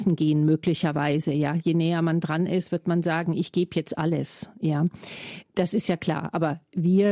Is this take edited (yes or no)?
no